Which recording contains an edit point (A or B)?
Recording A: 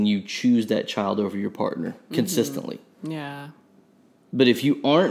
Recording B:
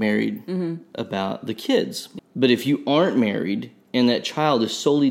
B